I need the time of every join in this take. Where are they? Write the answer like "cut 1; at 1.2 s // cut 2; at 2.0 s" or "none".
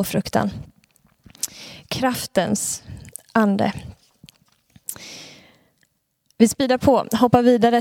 none